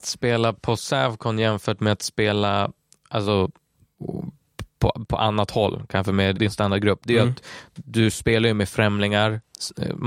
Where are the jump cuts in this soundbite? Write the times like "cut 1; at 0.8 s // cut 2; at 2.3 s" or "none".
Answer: cut 1; at 6.3 s